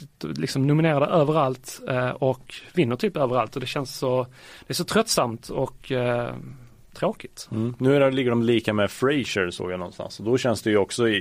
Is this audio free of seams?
yes; 0 cuts

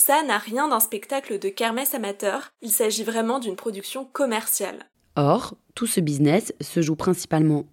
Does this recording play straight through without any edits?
yes; 0 cuts

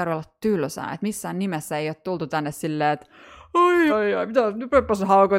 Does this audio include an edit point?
yes; 1 cut; at 3.9 s

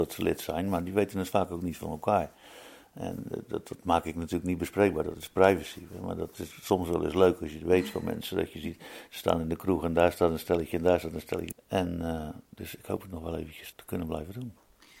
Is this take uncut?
no; 2 cuts; at 11.5 s, 13.7 s

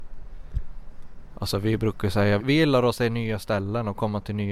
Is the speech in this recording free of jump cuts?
no; 1 cut; at 2.4 s

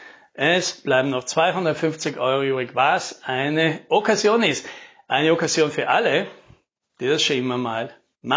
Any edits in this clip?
no; 0 cuts

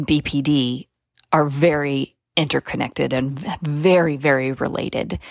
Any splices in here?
no; 0 cuts

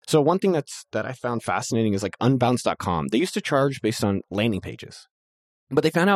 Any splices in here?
no; 0 cuts

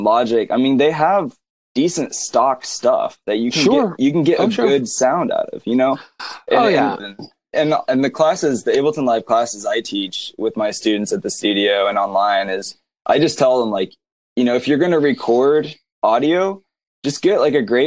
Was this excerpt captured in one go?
no; 1 cut; at 7.0 s

